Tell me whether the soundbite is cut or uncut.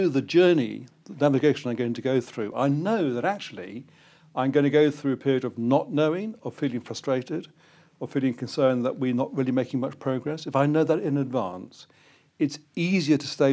uncut